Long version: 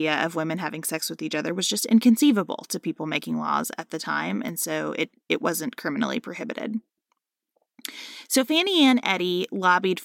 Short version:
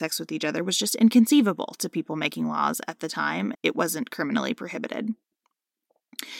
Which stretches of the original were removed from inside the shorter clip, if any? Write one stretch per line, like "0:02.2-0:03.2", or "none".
0:04.4-0:05.2

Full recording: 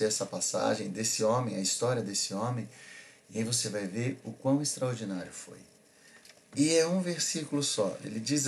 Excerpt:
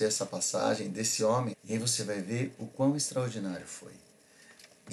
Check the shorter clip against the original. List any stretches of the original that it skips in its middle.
0:01.5-0:03.2

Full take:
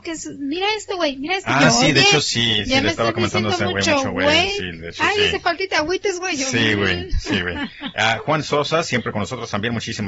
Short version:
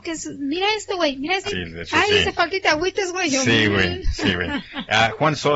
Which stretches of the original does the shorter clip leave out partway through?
0:01.5-0:04.5

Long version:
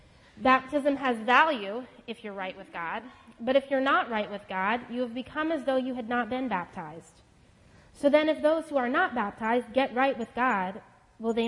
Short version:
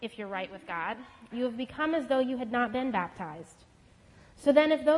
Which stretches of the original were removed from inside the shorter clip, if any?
0:03.4-0:04.9

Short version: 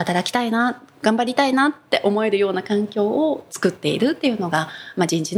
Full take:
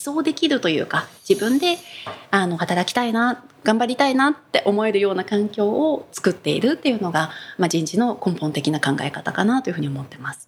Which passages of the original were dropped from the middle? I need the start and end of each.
none

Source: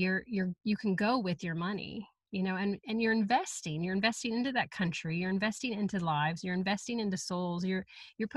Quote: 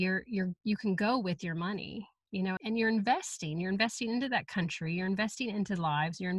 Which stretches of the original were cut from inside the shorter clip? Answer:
0:02.6-0:02.8

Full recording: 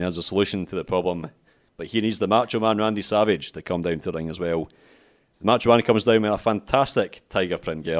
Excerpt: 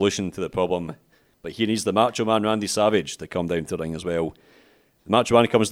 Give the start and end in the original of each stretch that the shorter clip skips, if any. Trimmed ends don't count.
none

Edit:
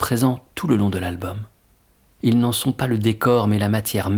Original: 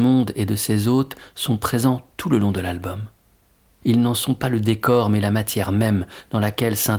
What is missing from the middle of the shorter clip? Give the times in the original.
none

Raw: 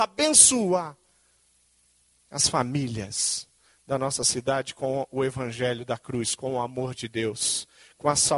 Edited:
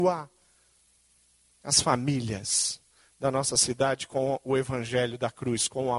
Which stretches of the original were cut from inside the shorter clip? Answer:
none

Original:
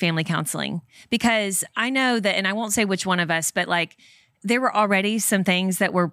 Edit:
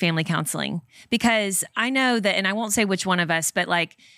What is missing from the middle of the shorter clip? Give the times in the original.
none

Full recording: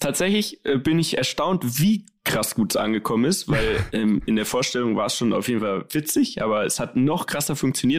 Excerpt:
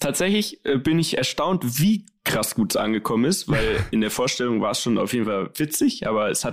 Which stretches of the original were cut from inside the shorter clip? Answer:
0:03.9-0:04.3

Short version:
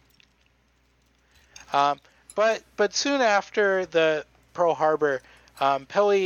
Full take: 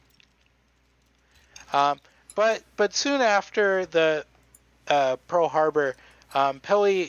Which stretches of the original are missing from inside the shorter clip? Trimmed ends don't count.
0:04.5-0:05.2

